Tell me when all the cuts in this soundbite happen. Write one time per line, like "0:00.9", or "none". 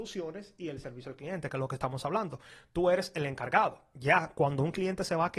none